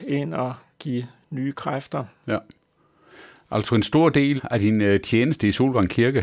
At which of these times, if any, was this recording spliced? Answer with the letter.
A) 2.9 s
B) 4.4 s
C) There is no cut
B